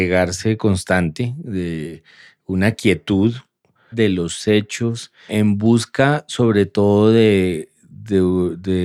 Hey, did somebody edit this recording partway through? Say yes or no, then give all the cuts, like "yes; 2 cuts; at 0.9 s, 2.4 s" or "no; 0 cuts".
yes; 2 cuts; at 3.9 s, 5.3 s